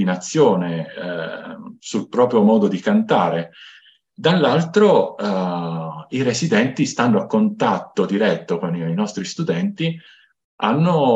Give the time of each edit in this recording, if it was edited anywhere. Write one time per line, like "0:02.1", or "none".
none